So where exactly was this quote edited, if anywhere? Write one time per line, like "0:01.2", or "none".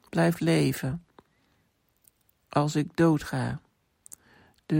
none